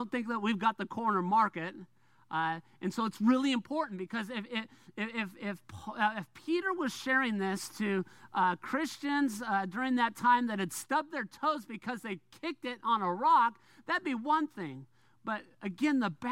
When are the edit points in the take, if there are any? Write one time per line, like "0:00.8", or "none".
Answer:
none